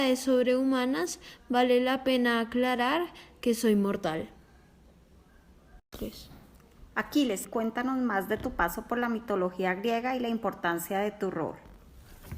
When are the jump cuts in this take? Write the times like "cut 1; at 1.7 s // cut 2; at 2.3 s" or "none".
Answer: cut 1; at 7.4 s